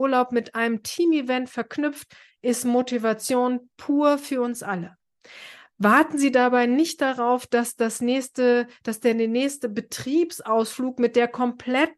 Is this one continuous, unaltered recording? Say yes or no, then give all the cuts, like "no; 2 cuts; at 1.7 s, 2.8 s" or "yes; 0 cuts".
yes; 0 cuts